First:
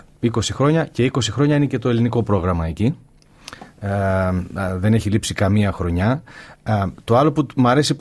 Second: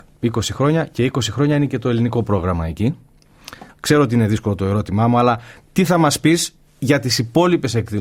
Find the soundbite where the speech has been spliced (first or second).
second